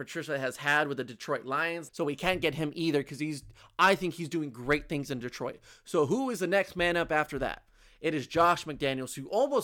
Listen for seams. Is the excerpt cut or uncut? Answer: cut